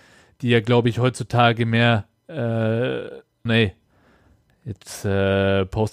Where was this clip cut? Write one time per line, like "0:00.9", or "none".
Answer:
0:03.5